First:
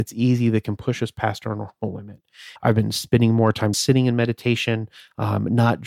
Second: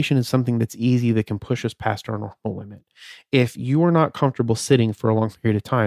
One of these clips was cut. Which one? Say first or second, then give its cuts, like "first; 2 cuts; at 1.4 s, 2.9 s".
first; 2 cuts; at 2.6 s, 3.7 s